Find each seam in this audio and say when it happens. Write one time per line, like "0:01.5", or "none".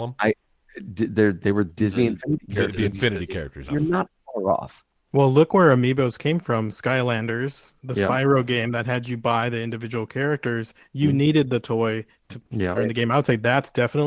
0:03.7
0:05.1
0:12.7